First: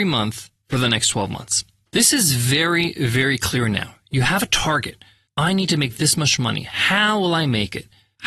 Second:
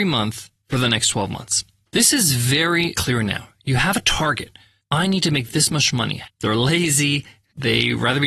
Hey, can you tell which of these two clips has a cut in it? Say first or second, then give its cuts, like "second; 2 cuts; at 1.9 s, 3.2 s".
second; 2 cuts; at 2.9 s, 6.2 s